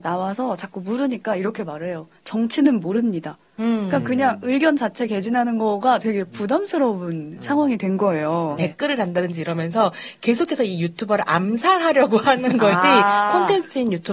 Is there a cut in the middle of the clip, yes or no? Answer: yes